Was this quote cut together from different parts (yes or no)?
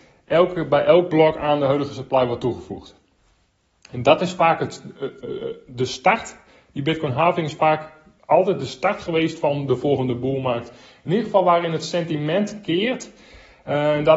no